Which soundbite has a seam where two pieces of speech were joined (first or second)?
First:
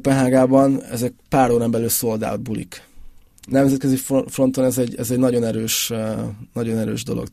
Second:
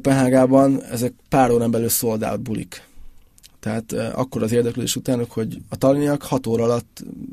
first